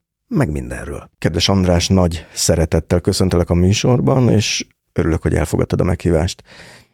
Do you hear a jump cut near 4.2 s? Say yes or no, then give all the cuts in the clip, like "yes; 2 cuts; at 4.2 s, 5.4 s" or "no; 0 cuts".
no; 1 cut; at 1.1 s